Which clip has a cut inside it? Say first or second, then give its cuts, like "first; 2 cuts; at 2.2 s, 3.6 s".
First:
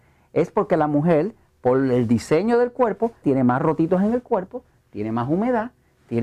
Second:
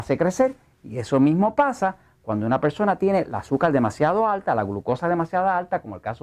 first; 1 cut; at 3.2 s